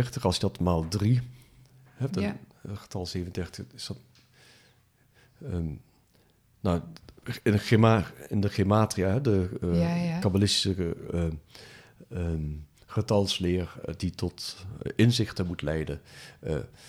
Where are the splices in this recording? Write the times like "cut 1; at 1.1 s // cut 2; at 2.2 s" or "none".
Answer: none